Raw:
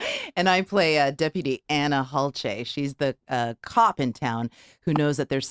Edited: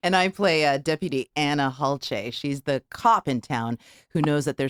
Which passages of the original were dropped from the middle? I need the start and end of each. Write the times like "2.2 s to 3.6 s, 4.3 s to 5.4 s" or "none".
3.2 s to 3.6 s